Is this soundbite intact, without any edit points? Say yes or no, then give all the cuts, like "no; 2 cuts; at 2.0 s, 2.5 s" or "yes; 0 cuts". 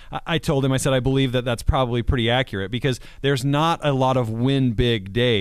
yes; 0 cuts